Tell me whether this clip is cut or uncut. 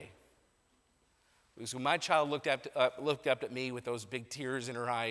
uncut